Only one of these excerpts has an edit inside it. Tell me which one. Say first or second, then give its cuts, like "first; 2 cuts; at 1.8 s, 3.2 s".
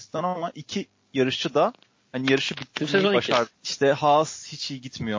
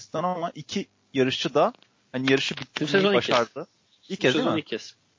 first; 1 cut; at 3.5 s